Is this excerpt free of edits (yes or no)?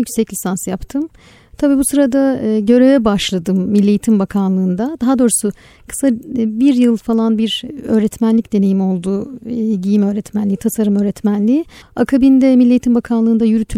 yes